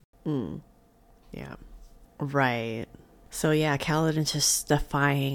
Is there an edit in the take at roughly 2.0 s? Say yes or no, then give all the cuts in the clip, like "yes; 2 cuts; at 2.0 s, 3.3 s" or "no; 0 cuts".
yes; 1 cut; at 2.0 s